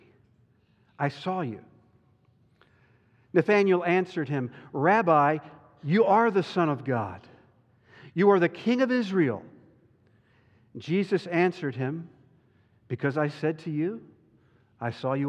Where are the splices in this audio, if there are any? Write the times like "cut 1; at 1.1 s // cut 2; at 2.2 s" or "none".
none